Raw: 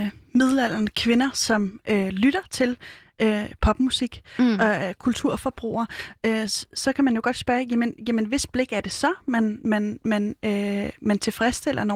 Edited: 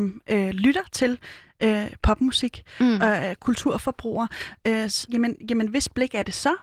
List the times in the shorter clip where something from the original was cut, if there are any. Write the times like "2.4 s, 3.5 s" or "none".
5.1 s